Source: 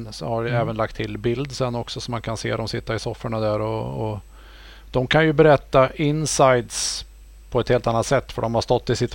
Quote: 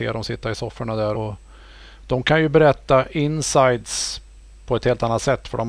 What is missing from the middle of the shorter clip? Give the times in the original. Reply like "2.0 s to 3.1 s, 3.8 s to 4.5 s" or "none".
3.6 s to 4.0 s